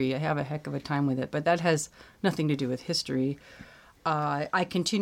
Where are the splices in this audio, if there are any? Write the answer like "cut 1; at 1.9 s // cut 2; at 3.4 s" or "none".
none